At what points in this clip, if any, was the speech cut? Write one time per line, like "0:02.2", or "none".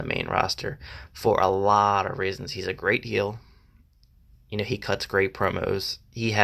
none